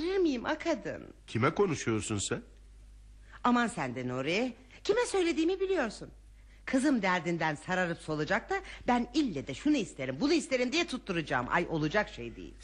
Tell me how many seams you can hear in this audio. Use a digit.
1